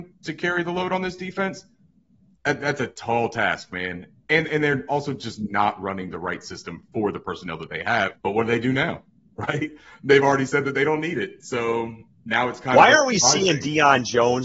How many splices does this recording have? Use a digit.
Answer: 1